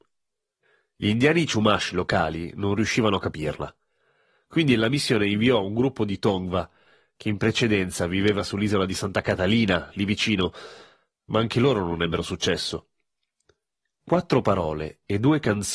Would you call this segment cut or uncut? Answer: uncut